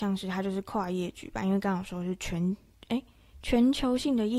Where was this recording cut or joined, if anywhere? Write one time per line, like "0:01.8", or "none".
none

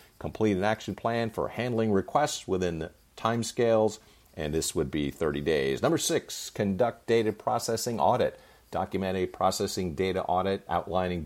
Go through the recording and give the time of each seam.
none

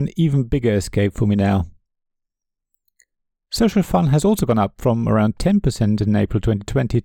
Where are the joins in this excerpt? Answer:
none

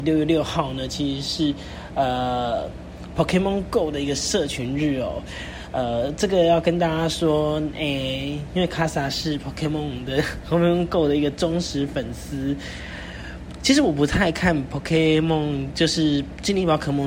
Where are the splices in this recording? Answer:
none

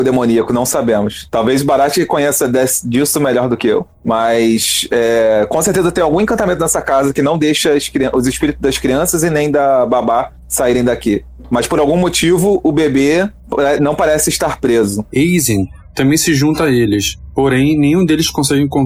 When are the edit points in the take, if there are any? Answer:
0:15.1

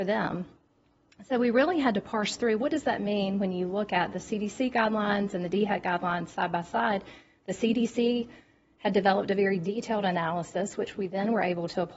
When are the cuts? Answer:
none

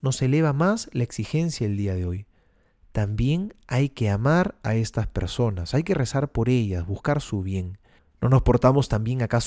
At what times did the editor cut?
0:08.0

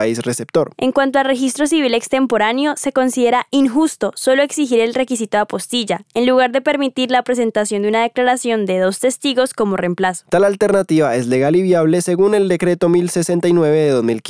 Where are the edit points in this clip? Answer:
none

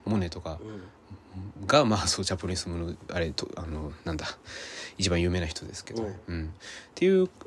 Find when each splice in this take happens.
none

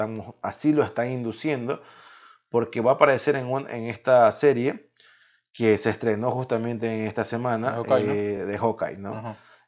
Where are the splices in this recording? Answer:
none

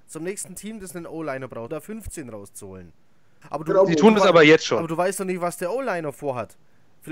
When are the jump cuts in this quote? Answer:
0:01.7
0:03.4

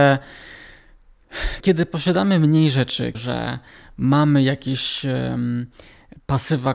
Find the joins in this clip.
0:01.6
0:03.1

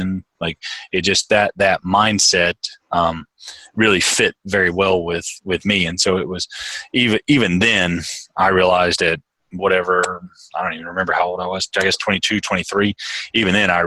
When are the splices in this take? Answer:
none

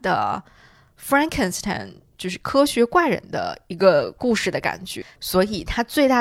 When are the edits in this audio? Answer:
0:05.2

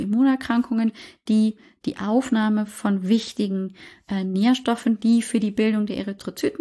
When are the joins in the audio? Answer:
none

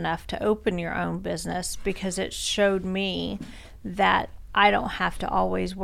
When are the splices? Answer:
none

